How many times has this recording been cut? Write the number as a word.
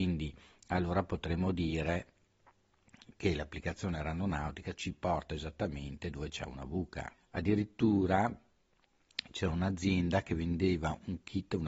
one